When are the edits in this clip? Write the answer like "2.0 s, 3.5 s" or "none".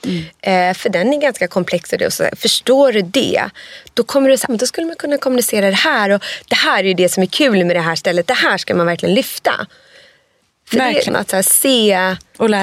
4.5 s, 11.1 s